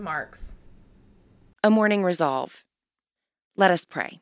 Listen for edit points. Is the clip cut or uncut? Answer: uncut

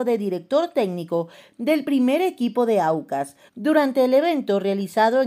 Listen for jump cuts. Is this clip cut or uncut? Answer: cut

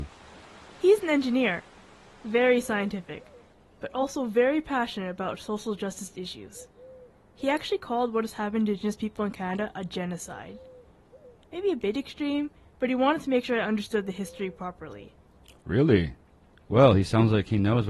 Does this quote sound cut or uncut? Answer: uncut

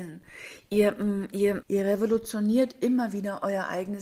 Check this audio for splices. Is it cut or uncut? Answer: cut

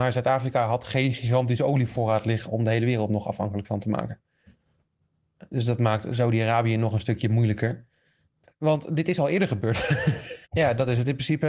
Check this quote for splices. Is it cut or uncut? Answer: cut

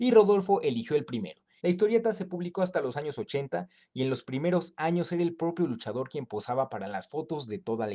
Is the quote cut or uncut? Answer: cut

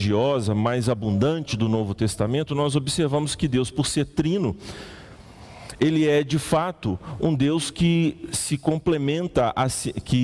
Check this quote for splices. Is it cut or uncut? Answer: uncut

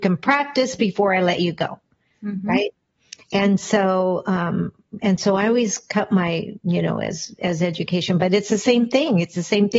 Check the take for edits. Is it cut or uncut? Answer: uncut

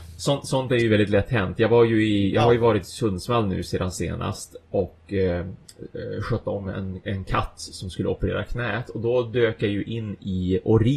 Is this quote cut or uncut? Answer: uncut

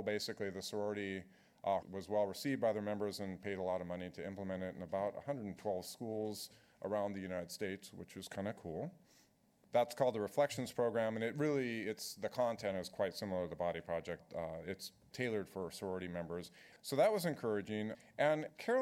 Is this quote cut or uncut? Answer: cut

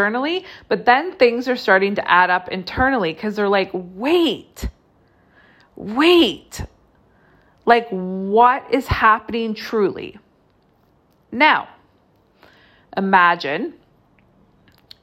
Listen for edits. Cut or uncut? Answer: uncut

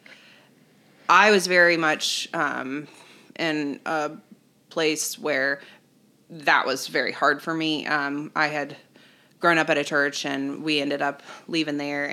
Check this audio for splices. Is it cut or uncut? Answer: uncut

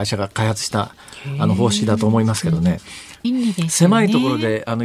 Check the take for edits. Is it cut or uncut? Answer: cut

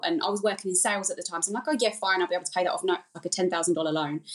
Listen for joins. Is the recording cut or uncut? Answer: cut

